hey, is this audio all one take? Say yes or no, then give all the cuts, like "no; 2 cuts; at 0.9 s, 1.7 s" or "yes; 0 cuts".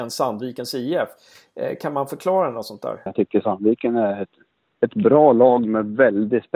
no; 1 cut; at 3.1 s